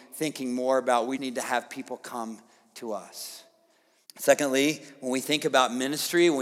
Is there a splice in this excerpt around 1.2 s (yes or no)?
yes